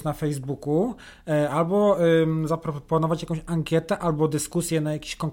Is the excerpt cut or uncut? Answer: uncut